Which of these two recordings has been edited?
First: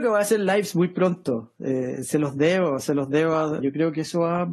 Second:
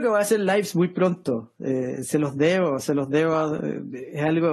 first; 1 cut; at 3.6 s

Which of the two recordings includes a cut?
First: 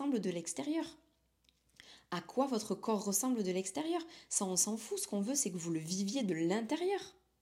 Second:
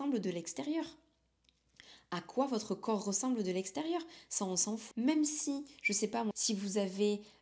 second; 2 cuts; at 4.9 s, 6.3 s

